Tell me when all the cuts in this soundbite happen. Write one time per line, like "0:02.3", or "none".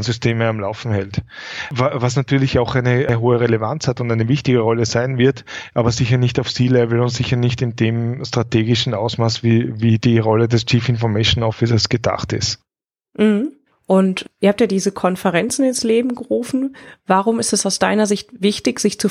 none